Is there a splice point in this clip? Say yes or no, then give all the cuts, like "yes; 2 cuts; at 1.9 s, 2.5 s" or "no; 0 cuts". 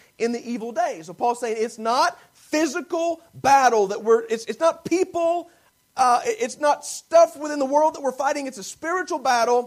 no; 0 cuts